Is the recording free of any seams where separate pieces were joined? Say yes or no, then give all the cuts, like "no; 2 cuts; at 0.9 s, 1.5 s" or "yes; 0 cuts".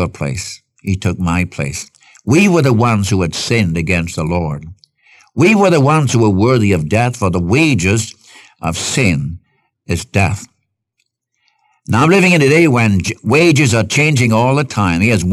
yes; 0 cuts